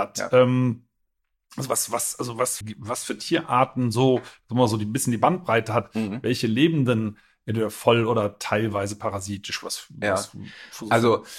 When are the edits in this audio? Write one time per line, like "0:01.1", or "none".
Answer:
0:02.6

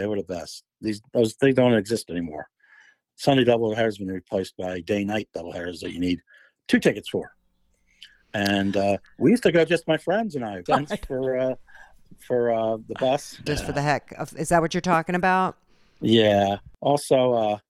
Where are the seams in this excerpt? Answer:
0:10.7
0:13.5

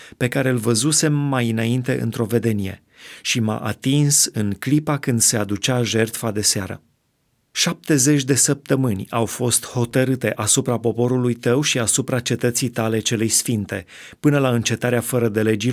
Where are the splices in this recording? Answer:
0:07.5

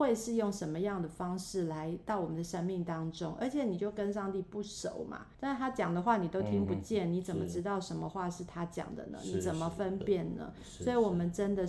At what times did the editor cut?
0:05.3

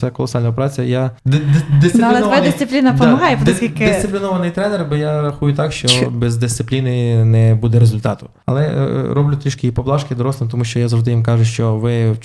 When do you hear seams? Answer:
none

